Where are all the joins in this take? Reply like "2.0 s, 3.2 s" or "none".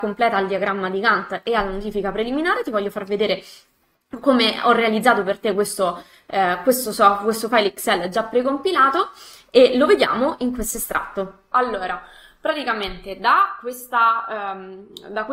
11.5 s